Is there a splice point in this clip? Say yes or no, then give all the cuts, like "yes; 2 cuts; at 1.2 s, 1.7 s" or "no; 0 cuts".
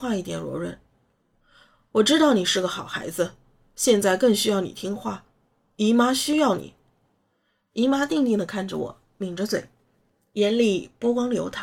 no; 0 cuts